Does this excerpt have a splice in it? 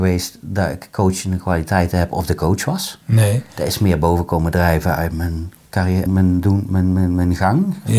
yes; 1 cut; at 6.1 s

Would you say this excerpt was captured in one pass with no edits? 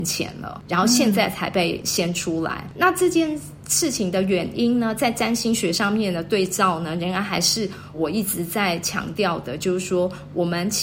no; 1 cut; at 7.9 s

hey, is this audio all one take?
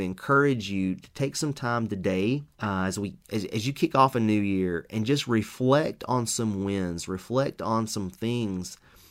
no; 1 cut; at 2.5 s

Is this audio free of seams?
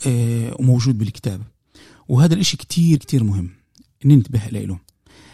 no; 1 cut; at 3.0 s

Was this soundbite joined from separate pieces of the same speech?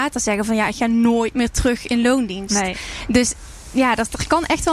no; 0 cuts

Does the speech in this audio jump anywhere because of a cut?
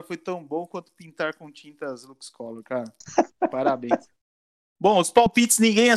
no; 0 cuts

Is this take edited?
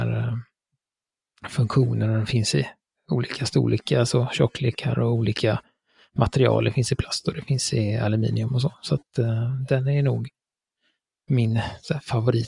no; 0 cuts

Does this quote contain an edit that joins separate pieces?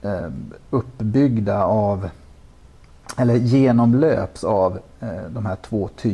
no; 0 cuts

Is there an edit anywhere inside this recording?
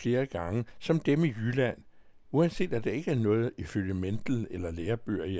no; 0 cuts

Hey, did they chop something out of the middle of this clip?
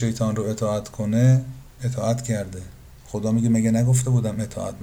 yes; 1 cut; at 1.7 s

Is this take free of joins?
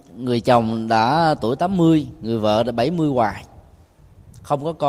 yes; 0 cuts

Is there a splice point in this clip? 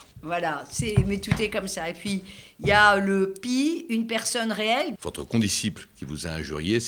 yes; 1 cut; at 5.0 s

